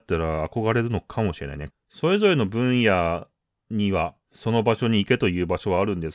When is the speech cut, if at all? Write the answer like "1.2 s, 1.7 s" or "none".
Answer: 1.7 s, 4.3 s